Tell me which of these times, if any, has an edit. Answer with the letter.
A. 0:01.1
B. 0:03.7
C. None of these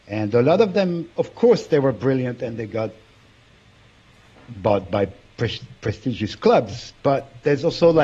A